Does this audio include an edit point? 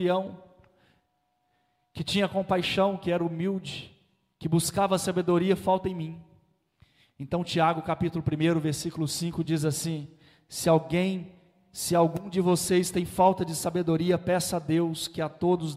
no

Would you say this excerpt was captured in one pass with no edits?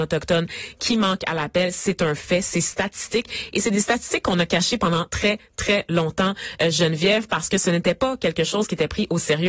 yes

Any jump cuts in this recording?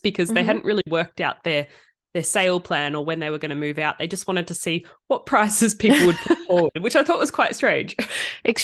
no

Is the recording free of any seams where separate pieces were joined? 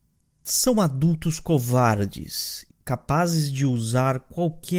no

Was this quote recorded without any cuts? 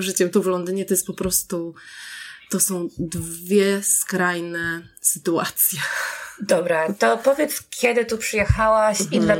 yes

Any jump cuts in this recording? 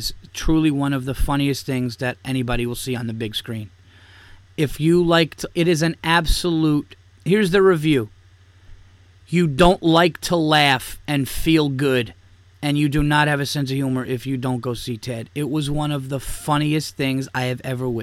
no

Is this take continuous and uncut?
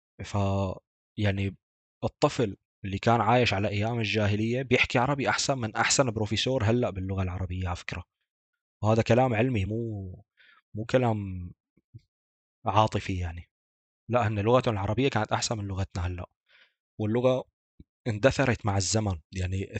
yes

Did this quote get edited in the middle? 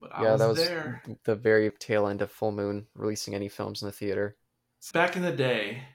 yes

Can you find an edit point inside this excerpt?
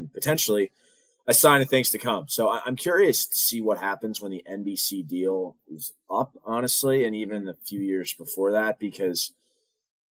no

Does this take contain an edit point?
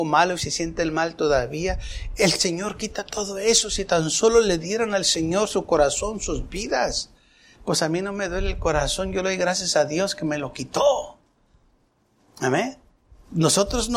yes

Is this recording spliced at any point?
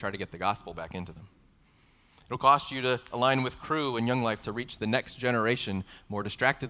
no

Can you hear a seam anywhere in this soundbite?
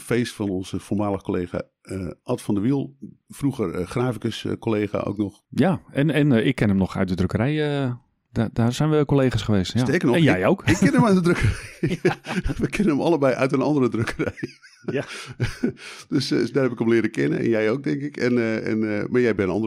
no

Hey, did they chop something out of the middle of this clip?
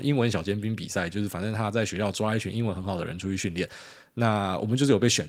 no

